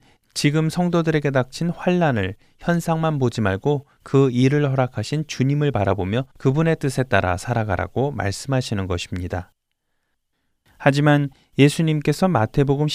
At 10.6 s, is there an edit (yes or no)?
no